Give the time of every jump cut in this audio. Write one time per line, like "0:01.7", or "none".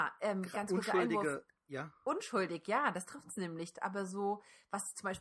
0:03.7